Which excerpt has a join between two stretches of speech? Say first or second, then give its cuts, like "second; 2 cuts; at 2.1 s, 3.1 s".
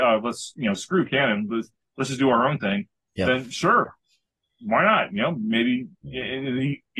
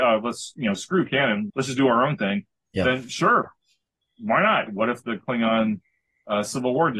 second; 2 cuts; at 1.5 s, 4.7 s